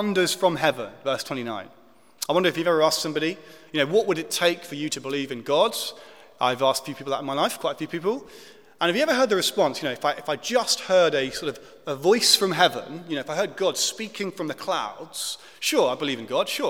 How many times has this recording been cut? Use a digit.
0